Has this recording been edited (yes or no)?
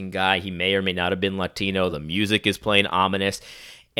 no